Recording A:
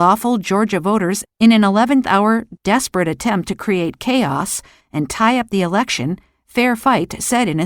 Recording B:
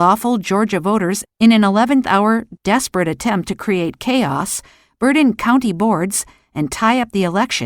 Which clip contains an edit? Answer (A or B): A